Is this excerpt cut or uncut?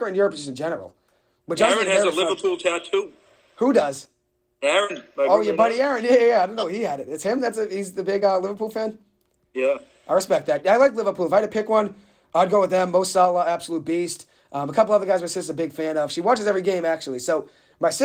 uncut